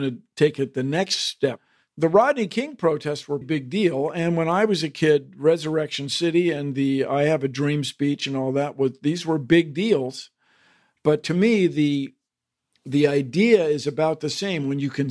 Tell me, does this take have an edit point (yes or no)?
yes